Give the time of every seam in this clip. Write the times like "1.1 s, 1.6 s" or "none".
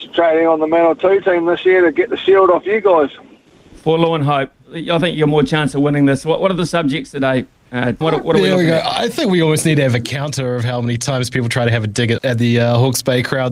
4.6 s, 8.0 s, 12.2 s